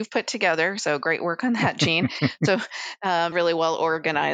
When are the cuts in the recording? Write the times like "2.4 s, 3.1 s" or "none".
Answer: 3.3 s

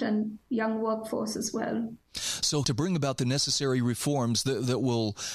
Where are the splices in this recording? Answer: 2.6 s

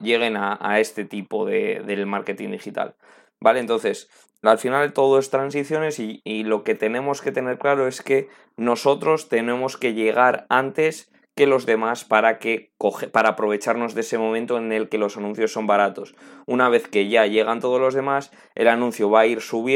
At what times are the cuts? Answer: 4.4 s

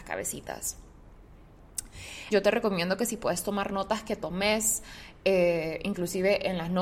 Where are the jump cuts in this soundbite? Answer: 2.3 s

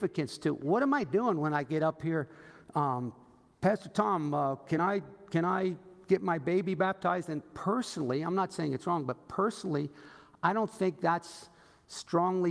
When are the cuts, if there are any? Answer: none

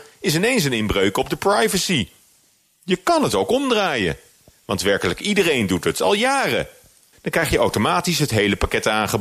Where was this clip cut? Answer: 4.5 s, 7.1 s

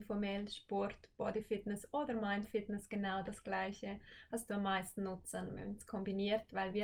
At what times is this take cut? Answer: none

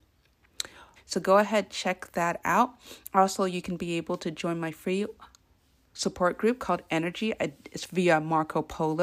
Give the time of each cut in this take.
1.0 s

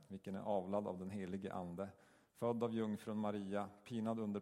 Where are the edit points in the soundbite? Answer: none

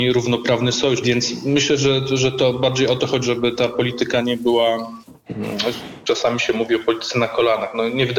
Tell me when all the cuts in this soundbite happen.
1.0 s, 3.2 s

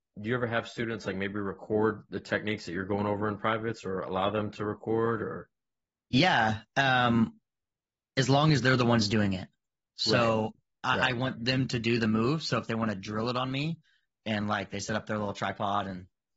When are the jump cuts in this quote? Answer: none

